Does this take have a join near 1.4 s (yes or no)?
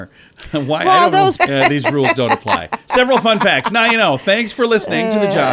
yes